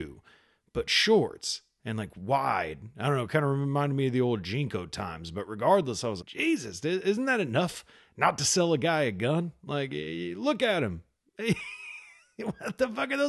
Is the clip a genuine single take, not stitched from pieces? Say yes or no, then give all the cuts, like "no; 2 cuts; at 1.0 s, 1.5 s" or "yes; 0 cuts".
no; 1 cut; at 6.2 s